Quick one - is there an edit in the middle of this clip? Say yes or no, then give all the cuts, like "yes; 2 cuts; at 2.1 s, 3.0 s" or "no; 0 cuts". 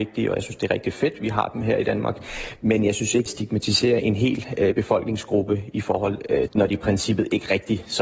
yes; 2 cuts; at 3.3 s, 6.5 s